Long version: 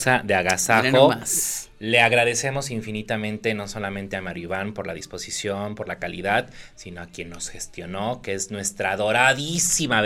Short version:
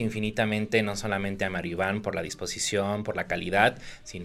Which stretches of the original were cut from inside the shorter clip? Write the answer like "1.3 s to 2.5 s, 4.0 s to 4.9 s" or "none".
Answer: none